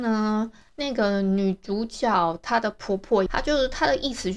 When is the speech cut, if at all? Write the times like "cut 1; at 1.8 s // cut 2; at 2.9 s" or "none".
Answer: cut 1; at 3.3 s